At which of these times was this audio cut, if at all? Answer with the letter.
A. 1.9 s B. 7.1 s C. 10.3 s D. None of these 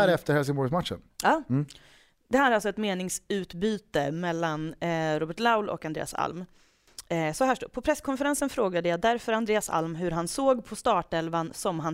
D